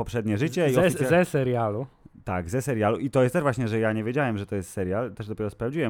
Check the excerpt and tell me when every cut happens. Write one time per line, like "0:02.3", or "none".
none